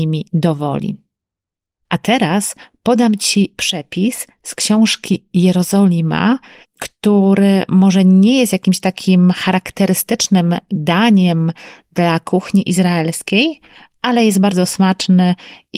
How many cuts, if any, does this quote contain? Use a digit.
1